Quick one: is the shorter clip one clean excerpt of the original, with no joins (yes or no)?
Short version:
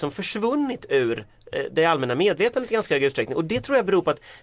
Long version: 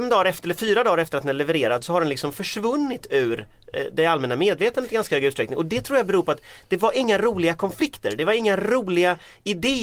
yes